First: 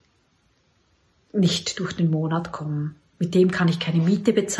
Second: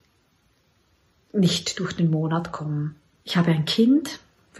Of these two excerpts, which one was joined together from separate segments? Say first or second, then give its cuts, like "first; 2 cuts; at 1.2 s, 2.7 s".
second; 1 cut; at 3.1 s